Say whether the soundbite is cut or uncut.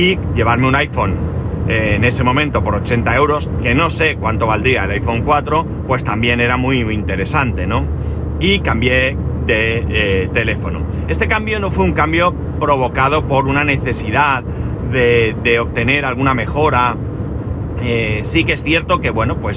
uncut